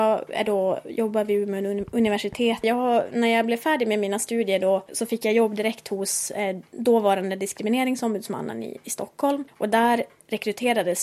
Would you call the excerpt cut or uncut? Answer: cut